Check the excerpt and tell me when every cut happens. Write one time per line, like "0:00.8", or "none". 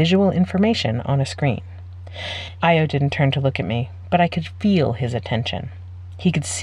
0:02.6